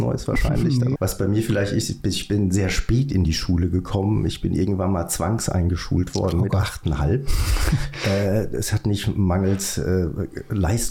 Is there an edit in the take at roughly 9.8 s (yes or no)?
no